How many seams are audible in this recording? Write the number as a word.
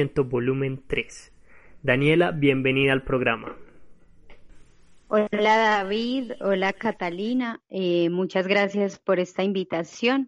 zero